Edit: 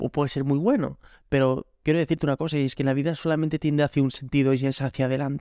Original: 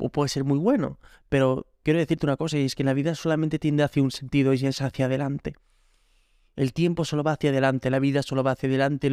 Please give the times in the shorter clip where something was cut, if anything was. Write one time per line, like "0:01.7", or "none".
none